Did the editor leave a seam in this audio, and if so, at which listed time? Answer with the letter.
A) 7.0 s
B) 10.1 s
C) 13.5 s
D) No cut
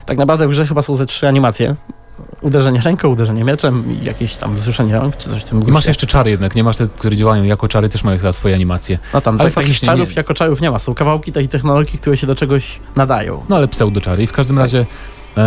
A